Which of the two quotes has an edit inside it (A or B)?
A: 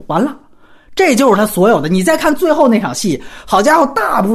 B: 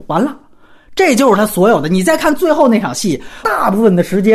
B